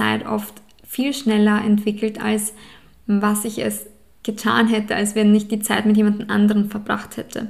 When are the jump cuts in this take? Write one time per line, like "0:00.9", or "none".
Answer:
none